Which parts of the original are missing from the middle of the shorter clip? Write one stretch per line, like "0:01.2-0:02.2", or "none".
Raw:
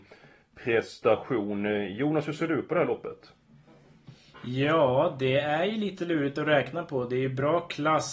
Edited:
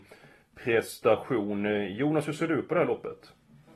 none

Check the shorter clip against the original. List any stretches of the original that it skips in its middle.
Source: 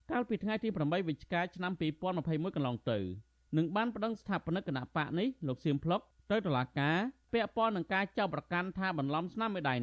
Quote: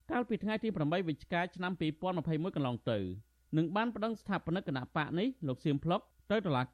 none

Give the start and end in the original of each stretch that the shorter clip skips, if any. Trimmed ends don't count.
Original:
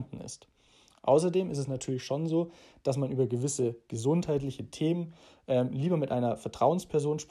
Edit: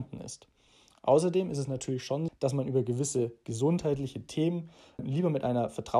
0:02.3-0:02.7
0:05.4-0:05.7

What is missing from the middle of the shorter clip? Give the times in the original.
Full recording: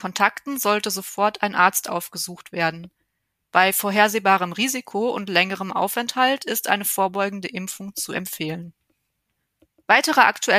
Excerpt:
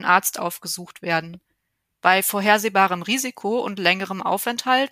none

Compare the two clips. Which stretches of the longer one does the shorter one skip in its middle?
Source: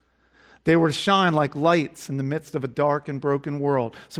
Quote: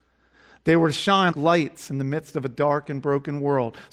0:01.3-0:01.5

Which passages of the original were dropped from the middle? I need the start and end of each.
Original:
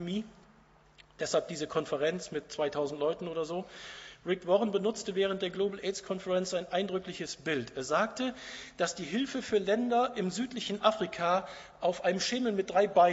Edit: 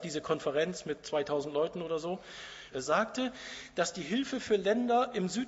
0:04.2-0:07.7

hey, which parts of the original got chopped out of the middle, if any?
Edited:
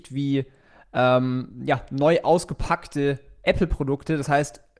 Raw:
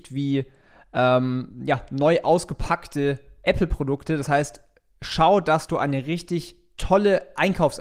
none

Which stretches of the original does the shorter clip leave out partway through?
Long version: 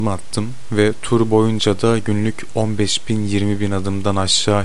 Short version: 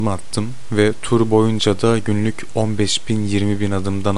none

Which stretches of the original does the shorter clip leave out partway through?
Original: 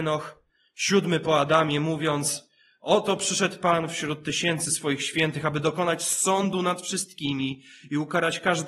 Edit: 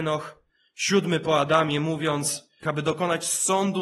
0:02.6-0:05.4

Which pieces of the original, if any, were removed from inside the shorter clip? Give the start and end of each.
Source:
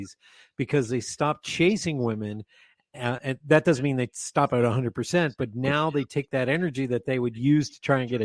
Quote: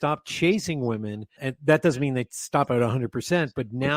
0:02.5-0:03.2

